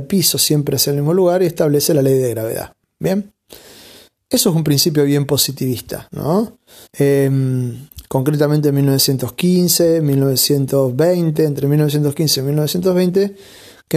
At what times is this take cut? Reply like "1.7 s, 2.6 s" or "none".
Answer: 6.9 s